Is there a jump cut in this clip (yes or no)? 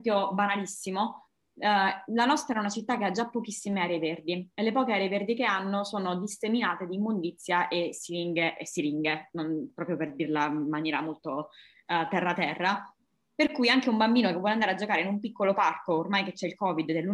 no